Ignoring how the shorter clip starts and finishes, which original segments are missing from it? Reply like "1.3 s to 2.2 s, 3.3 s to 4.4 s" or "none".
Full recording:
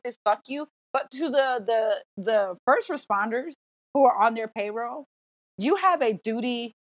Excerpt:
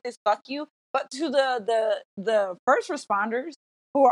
none